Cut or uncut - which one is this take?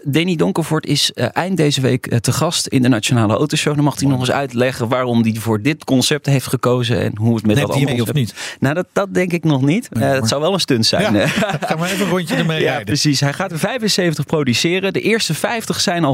cut